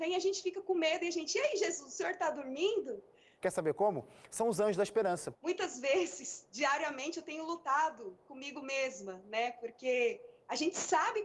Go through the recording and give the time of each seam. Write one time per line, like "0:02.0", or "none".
0:03.4
0:05.3